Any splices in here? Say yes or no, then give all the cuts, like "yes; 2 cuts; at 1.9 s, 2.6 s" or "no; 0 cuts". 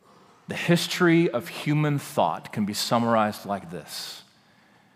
no; 0 cuts